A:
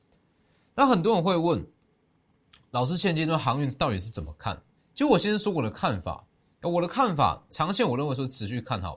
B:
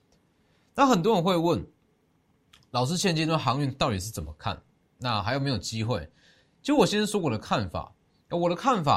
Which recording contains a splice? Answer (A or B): A